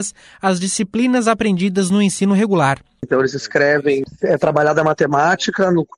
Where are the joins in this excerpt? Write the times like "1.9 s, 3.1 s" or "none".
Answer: 3.0 s